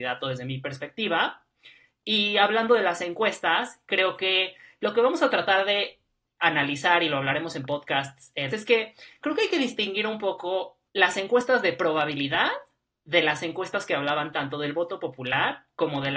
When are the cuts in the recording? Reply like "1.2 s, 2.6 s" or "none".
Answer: 8.5 s, 10.9 s

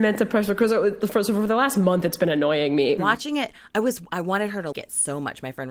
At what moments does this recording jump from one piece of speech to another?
3.0 s, 4.7 s

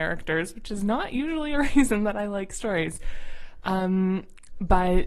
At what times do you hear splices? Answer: none

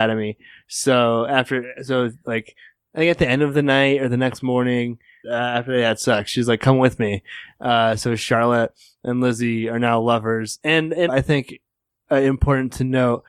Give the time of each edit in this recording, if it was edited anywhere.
5.2 s, 11.1 s

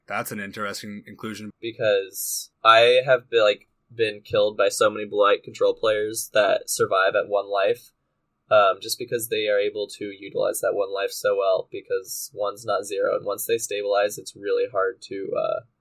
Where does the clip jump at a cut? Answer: 1.5 s

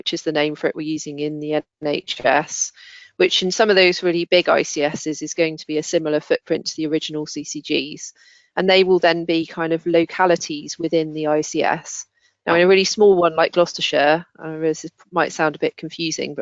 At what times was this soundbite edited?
none

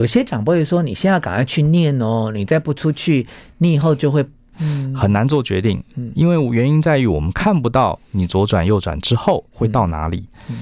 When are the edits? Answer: 4.5 s

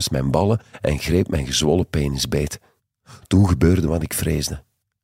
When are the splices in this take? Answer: none

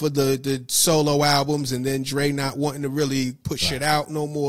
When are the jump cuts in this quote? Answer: none

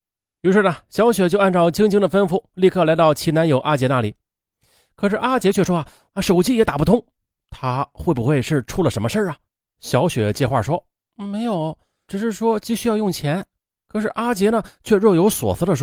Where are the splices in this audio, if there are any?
6.1 s, 12.1 s

